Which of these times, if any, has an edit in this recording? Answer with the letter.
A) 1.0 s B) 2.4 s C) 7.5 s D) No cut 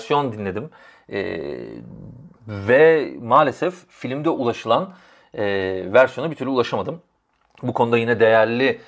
B